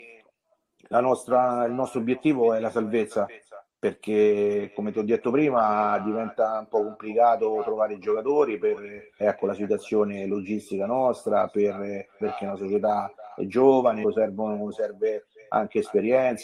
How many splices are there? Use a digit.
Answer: 3